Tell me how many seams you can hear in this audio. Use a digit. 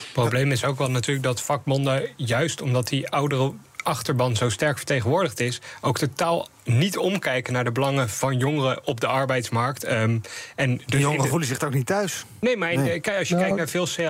0